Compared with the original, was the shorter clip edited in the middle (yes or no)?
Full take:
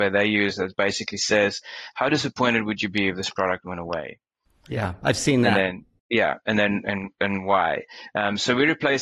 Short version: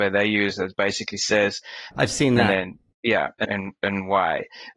yes